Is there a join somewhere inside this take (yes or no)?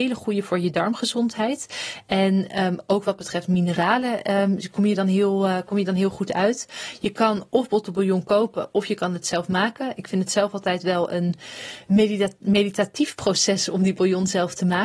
no